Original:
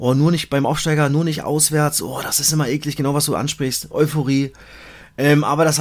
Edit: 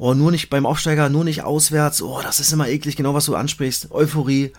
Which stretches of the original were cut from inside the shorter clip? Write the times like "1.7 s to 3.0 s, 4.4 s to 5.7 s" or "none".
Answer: none